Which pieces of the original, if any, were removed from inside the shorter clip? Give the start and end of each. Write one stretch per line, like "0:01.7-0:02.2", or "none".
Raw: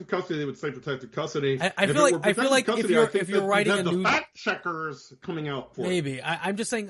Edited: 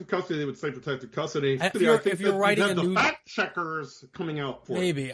0:01.7-0:02.8